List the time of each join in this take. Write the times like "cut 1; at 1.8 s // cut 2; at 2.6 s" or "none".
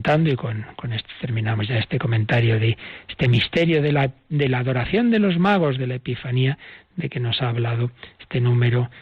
none